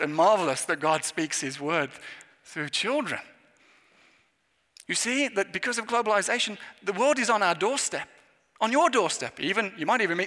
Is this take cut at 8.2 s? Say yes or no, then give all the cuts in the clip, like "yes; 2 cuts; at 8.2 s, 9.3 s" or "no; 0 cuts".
no; 0 cuts